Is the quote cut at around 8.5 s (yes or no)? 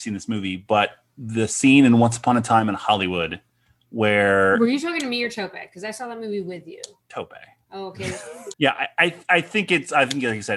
yes